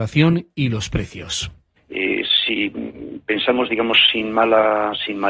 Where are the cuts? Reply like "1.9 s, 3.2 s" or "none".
none